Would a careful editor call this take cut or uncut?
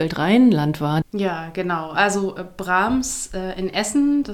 cut